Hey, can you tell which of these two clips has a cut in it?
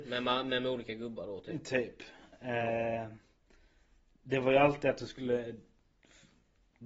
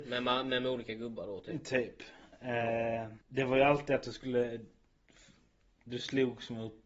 second; 1 cut; at 3.2 s

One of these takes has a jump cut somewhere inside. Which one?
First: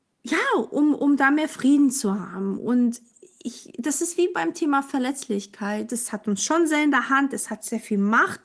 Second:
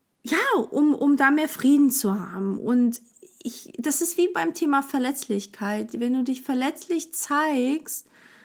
first; 1 cut; at 5.9 s

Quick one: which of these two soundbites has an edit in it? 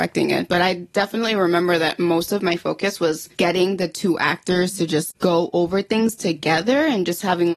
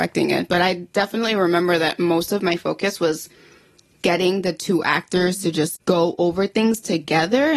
first; 1 cut; at 3.3 s

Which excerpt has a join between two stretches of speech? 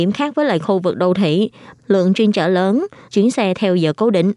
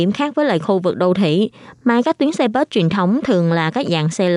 first; 2 cuts; at 1.8 s, 3.1 s

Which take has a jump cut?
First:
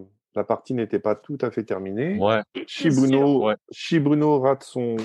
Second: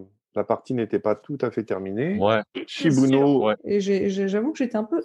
second; 1 cut; at 3.6 s

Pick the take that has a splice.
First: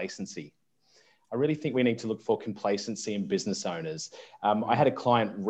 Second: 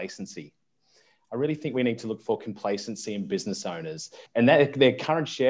second; 1 cut; at 4.3 s

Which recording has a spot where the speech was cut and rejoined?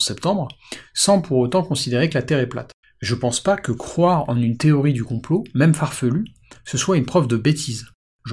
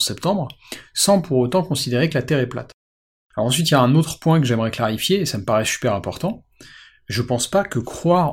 first; 1 cut; at 2.8 s

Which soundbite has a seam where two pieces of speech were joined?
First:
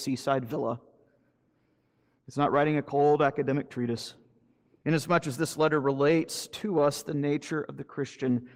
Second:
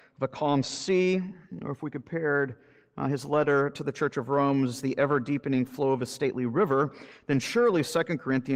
first; 1 cut; at 4.8 s

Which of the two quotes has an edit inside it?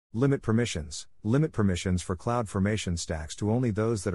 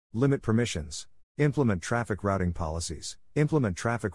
second; 1 cut; at 1.2 s

